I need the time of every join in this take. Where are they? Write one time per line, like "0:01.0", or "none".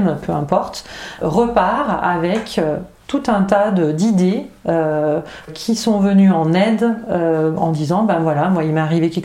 0:01.2
0:05.5